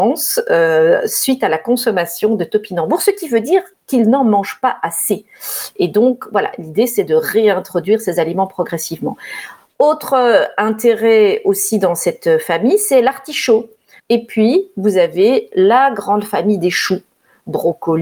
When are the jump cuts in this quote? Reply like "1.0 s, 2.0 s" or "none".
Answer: 14.0 s